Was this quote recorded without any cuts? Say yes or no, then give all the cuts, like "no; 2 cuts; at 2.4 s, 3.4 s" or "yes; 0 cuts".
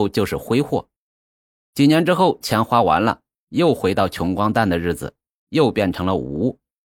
yes; 0 cuts